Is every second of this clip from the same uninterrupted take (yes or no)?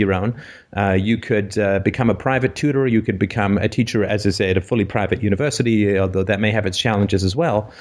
yes